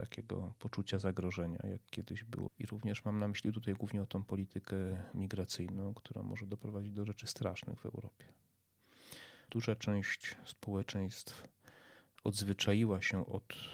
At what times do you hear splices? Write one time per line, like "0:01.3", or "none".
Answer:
0:02.5
0:09.5